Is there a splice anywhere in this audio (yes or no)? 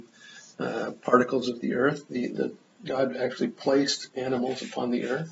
no